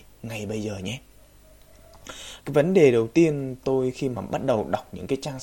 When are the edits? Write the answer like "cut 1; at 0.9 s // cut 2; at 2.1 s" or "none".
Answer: cut 1; at 2.4 s